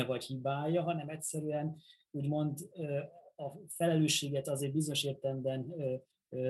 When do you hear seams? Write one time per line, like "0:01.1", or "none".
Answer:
none